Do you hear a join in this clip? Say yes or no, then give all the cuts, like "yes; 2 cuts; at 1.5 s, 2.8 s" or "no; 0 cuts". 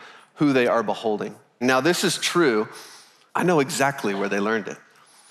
yes; 2 cuts; at 1.6 s, 3.3 s